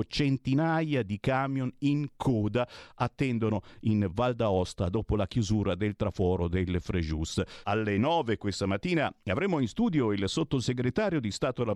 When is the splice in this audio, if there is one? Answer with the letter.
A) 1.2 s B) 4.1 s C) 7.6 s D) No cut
C